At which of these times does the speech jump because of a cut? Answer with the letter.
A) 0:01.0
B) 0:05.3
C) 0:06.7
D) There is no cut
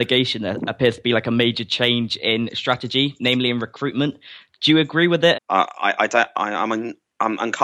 B